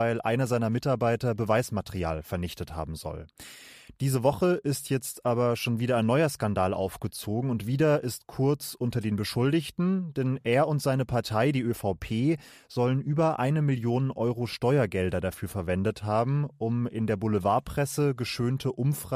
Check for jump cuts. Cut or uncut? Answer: uncut